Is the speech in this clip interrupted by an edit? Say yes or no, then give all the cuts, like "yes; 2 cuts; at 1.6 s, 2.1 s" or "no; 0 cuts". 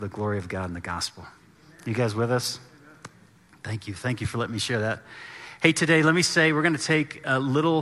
no; 0 cuts